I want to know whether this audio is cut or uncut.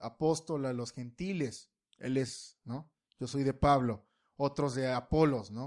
uncut